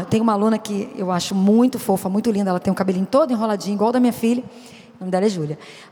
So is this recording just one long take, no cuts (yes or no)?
yes